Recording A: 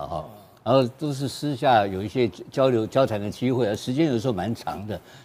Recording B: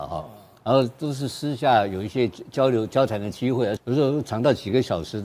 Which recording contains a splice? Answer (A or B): B